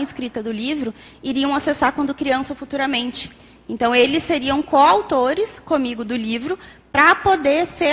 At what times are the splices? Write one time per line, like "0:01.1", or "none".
none

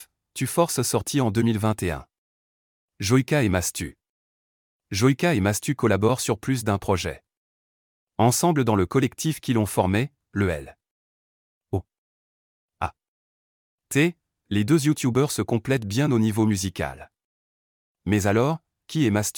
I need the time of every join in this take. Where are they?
none

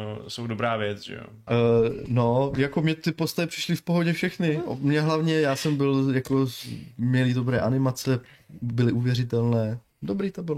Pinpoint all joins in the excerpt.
0:01.5

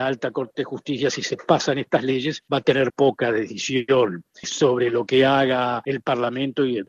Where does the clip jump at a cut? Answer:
0:02.9

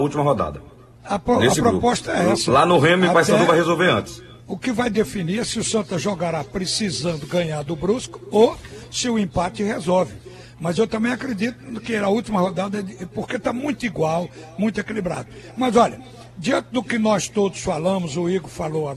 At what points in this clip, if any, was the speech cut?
0:01.0

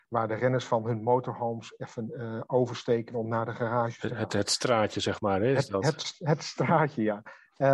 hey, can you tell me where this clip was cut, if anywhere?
none

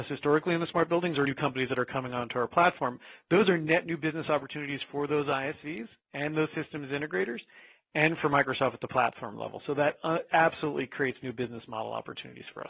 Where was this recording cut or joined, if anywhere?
0:01.2

